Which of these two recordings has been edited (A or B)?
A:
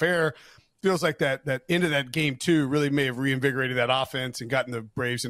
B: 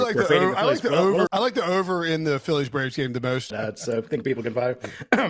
B